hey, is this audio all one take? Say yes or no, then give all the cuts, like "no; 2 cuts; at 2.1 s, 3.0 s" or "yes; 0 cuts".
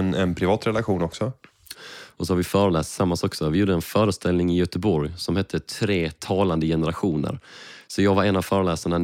no; 1 cut; at 1.7 s